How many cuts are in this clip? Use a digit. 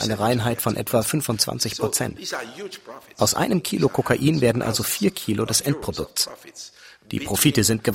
0